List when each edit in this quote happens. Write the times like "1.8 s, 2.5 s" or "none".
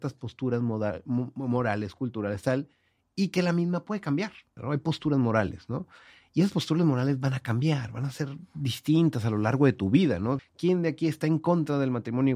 4.6 s, 10.4 s